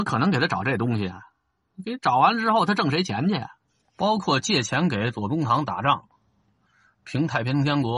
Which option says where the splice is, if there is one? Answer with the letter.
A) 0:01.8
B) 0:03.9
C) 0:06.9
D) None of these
D